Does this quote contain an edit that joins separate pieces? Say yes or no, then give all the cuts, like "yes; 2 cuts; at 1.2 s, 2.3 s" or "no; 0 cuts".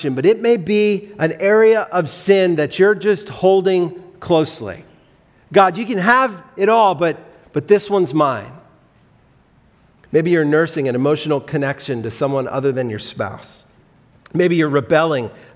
yes; 1 cut; at 10.0 s